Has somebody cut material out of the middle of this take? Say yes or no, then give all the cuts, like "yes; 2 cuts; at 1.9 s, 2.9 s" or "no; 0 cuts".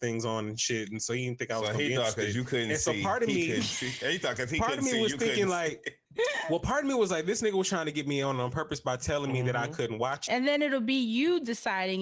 yes; 2 cuts; at 6.1 s, 10.3 s